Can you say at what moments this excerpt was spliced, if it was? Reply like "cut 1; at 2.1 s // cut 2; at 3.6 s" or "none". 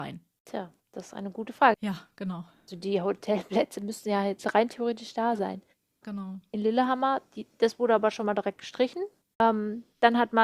cut 1; at 1.7 s // cut 2; at 6.0 s